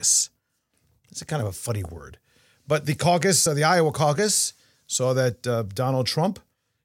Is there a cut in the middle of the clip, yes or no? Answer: no